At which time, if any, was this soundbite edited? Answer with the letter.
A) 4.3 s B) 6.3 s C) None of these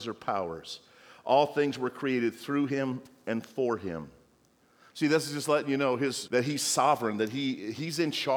B